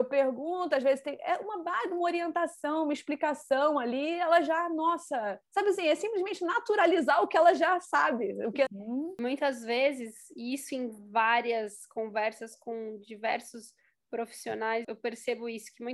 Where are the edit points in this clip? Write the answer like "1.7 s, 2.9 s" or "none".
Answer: 8.7 s, 14.8 s